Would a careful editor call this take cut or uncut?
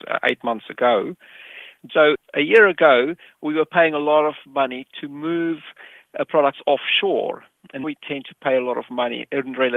cut